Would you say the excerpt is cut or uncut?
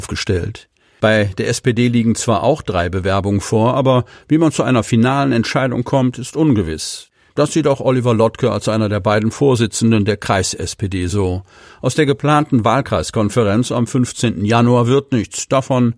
cut